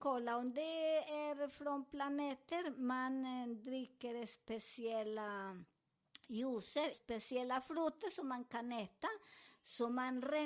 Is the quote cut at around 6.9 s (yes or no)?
yes